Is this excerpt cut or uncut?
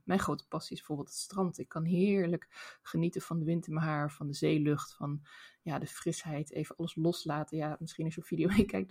uncut